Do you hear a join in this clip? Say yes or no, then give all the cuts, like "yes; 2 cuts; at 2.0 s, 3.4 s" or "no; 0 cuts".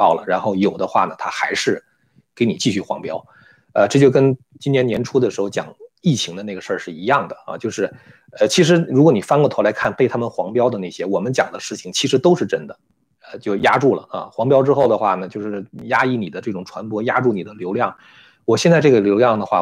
yes; 1 cut; at 13.2 s